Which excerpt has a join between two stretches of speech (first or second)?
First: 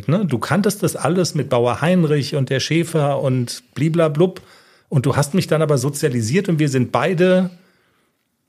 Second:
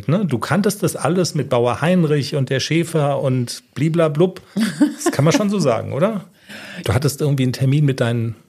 second